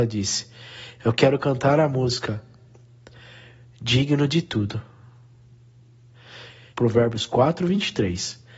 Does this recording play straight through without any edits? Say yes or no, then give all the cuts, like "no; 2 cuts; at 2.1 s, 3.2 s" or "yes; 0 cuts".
no; 1 cut; at 6.7 s